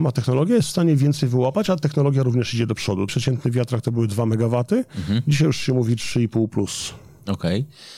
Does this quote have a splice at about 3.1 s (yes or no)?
yes